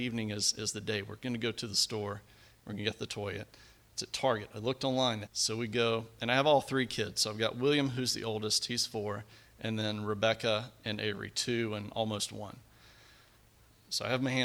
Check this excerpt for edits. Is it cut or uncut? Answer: cut